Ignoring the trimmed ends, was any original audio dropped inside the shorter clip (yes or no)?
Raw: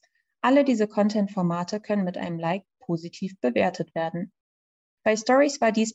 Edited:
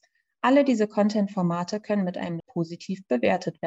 yes